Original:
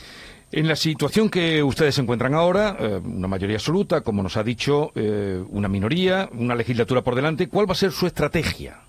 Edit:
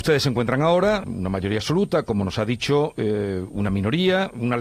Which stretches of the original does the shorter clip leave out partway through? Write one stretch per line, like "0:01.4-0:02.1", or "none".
0:02.8-0:03.0